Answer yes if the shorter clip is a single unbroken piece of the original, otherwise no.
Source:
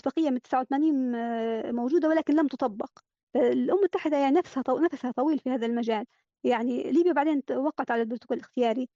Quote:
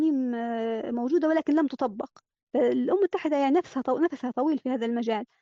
yes